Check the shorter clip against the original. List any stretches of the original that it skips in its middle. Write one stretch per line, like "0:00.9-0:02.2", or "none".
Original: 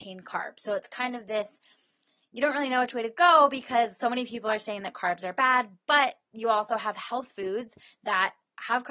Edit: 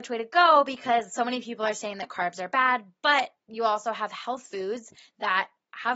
none